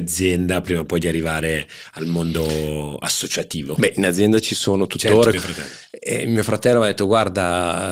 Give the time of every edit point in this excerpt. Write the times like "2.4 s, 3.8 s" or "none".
5.3 s